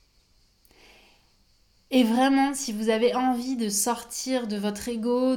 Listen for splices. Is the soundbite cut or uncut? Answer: uncut